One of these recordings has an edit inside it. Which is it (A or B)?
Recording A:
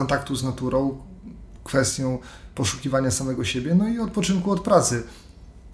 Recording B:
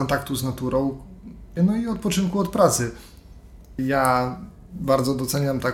B